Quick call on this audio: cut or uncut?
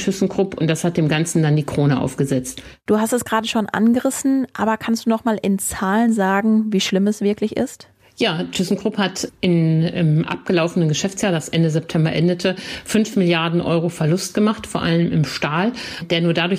uncut